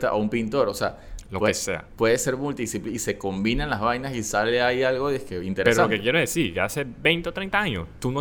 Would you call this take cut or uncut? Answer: uncut